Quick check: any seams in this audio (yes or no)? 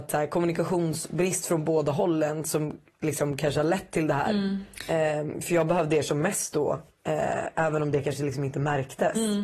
yes